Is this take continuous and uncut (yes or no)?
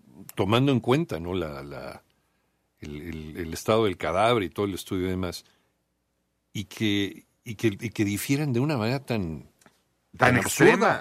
yes